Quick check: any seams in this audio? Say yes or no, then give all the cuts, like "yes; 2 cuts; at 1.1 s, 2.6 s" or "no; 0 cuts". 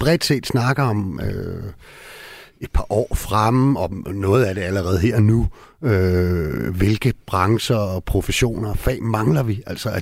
no; 0 cuts